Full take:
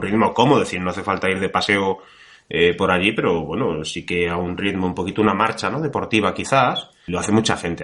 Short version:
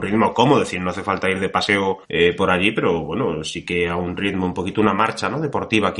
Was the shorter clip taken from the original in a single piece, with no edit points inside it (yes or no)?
no